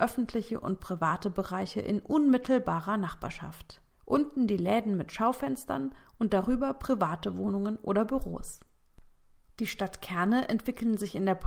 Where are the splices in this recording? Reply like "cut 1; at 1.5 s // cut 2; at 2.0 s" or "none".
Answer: cut 1; at 3.9 s